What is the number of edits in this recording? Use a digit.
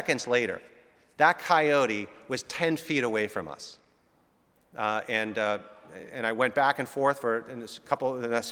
1